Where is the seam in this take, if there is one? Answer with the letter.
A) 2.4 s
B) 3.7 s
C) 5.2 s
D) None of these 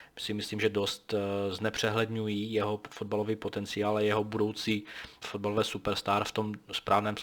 C